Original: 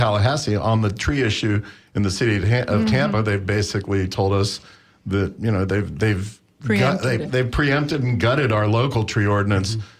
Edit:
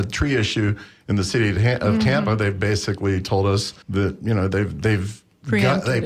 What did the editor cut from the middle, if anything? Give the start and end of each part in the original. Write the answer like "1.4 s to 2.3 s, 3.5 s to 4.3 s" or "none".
4.7 s to 5.0 s